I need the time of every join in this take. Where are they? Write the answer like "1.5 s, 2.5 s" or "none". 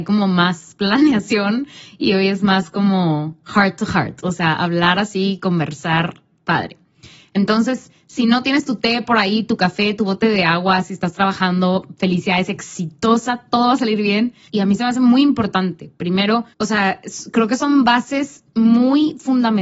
14.5 s, 16.5 s